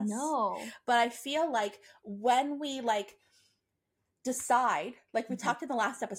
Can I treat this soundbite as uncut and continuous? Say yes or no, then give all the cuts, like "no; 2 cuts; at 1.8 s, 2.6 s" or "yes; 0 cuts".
yes; 0 cuts